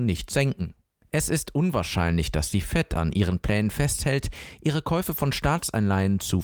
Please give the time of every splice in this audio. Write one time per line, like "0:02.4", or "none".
0:01.0